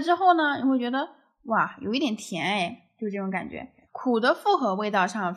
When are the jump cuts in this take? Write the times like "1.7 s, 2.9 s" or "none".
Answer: 3.9 s